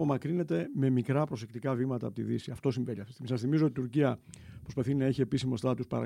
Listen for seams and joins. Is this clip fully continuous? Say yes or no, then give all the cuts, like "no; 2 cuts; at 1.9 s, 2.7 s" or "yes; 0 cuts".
yes; 0 cuts